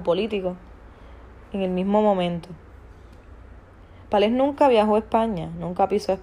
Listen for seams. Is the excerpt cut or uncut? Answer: uncut